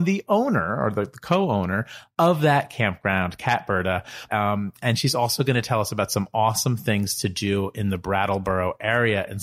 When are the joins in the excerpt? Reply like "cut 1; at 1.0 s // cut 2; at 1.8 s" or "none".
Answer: cut 1; at 4.3 s